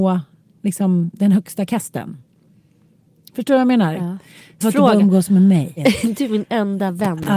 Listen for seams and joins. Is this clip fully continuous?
no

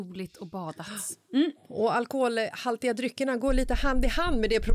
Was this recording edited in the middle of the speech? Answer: no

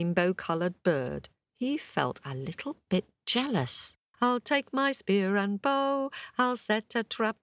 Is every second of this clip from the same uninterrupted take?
no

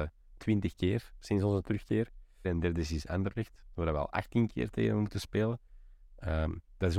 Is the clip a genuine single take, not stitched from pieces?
no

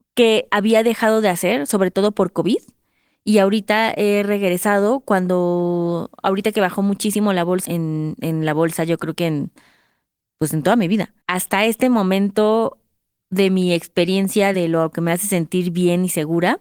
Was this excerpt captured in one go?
no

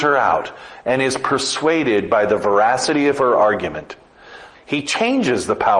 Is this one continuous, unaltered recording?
no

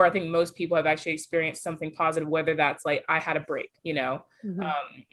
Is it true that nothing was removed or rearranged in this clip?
no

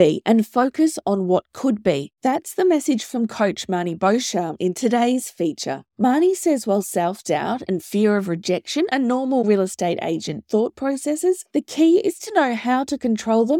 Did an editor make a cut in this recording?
no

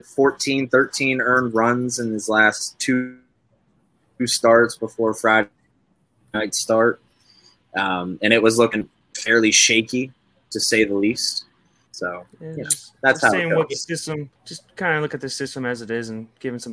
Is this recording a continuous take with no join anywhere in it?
no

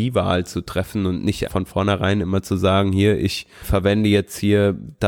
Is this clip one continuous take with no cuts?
no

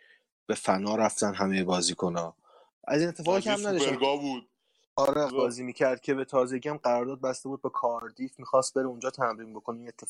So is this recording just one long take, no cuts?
no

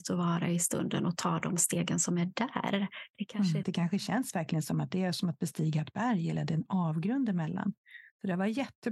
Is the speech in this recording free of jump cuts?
no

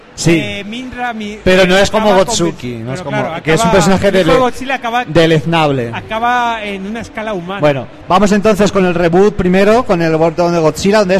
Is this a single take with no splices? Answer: yes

